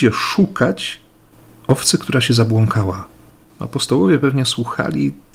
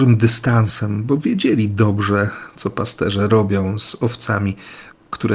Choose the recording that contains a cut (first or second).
first